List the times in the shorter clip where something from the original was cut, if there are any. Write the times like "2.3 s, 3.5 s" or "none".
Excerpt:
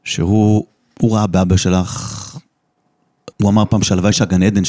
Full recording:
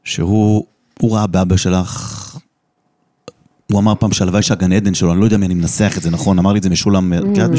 3.3 s